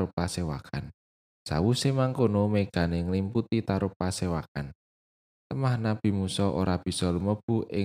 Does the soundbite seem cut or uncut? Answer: cut